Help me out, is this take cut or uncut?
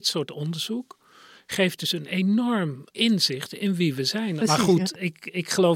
cut